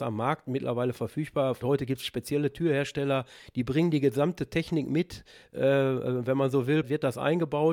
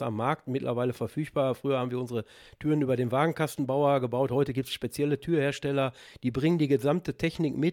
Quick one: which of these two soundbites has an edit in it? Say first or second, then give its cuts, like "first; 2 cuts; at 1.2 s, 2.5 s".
first; 2 cuts; at 1.6 s, 6.8 s